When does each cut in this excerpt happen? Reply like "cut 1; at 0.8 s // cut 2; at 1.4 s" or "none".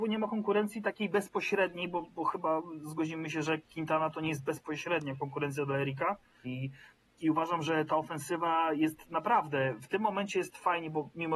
cut 1; at 6.4 s